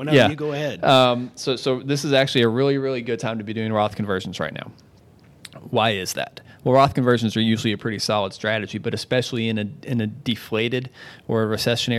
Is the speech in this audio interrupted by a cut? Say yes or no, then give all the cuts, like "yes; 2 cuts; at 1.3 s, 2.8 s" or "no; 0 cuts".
no; 0 cuts